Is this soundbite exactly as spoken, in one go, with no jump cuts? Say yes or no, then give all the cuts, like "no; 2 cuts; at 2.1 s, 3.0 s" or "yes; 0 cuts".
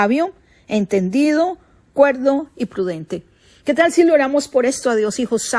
yes; 0 cuts